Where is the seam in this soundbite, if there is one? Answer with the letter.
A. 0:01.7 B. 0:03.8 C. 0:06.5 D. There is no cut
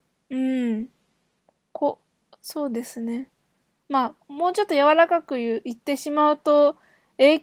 B